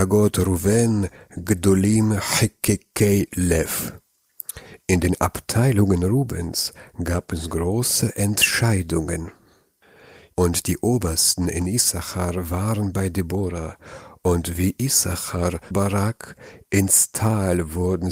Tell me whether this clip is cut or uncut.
cut